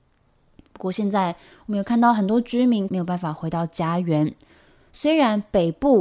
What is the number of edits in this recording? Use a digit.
1